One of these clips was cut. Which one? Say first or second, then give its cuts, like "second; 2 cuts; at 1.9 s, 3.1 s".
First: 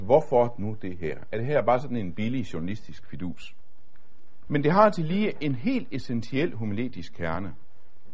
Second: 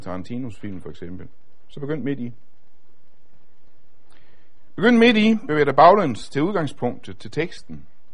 first; 1 cut; at 4.5 s